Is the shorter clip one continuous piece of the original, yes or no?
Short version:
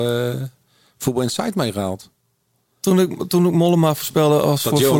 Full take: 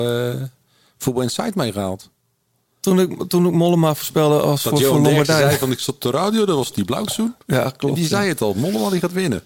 yes